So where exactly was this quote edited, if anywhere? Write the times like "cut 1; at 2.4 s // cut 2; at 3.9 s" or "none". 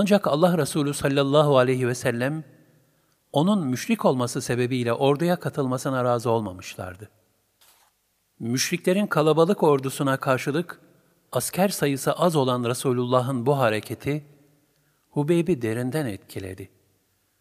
none